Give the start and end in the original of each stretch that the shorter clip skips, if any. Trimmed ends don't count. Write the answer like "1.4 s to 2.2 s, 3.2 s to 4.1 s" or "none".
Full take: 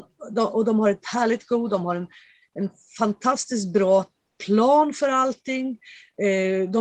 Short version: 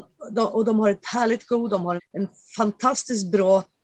2.0 s to 2.4 s